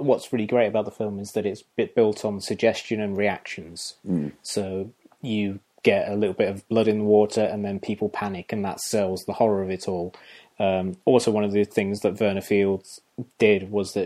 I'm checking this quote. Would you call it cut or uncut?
uncut